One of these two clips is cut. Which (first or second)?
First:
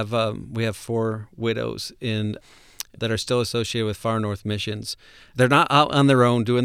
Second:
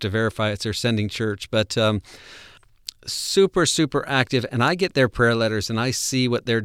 first